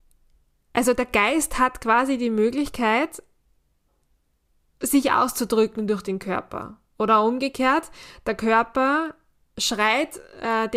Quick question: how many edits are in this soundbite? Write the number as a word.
zero